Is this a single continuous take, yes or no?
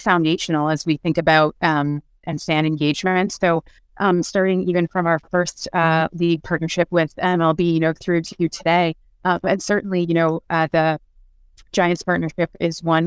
no